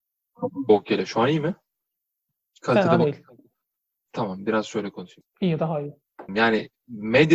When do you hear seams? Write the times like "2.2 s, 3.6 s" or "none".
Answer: 4.1 s, 5.2 s, 6.3 s